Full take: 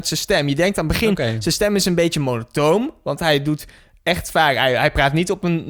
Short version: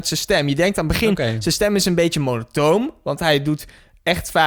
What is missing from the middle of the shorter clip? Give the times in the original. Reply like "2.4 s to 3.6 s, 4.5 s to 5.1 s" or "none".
none